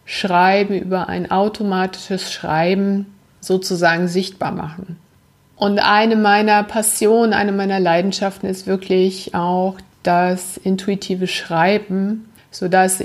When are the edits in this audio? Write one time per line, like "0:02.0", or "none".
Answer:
none